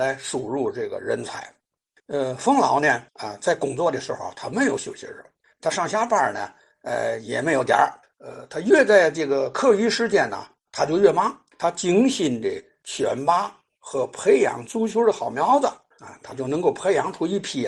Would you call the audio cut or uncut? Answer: cut